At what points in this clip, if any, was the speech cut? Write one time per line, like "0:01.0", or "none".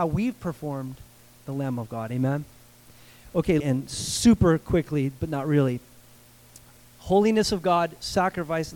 0:01.4
0:03.6